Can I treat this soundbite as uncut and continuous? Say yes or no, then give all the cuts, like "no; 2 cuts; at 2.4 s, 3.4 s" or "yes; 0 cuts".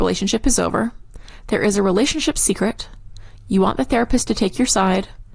yes; 0 cuts